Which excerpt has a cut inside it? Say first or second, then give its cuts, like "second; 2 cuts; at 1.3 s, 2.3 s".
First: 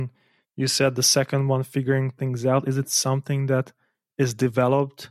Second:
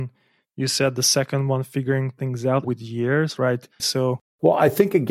second; 2 cuts; at 2.6 s, 3.8 s